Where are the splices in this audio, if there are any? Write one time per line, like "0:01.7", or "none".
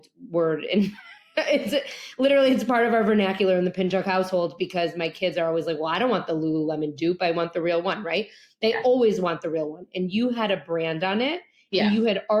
none